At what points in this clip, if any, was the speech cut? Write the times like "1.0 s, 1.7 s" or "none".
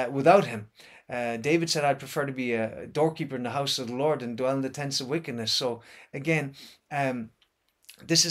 none